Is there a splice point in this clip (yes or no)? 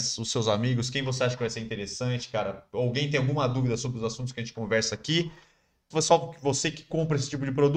yes